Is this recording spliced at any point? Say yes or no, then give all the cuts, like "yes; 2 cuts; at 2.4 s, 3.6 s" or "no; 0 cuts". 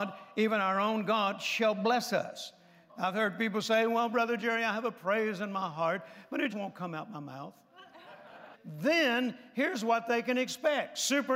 yes; 3 cuts; at 2.9 s, 6.5 s, 8.5 s